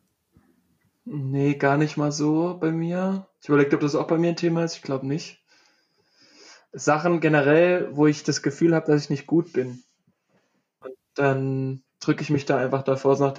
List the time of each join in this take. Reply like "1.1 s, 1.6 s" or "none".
10.8 s

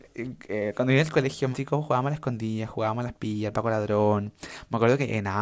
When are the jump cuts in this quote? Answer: 1.5 s

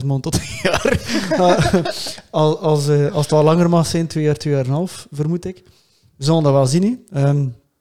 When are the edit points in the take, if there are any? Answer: none

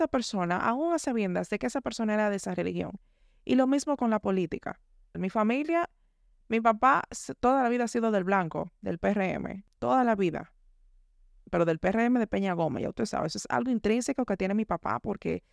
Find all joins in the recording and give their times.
5.1 s

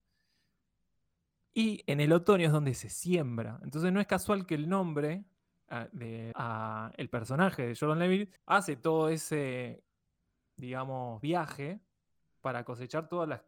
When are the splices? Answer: 6.3 s, 8.4 s

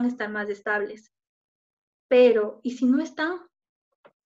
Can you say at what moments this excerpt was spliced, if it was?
none

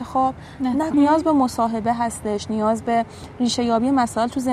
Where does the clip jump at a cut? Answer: 0.9 s

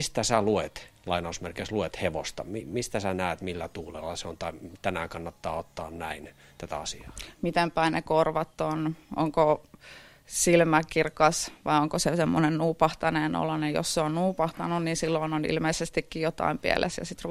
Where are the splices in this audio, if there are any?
7.3 s

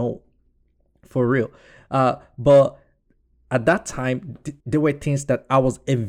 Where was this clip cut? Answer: 4.6 s

